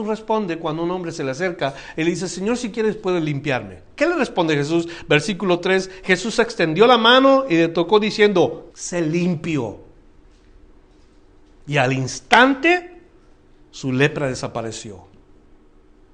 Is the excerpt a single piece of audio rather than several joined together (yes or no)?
no